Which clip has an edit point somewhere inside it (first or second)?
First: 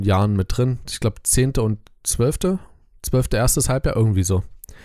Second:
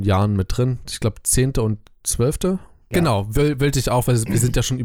second